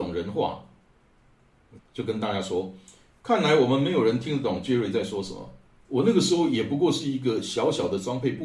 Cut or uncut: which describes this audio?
cut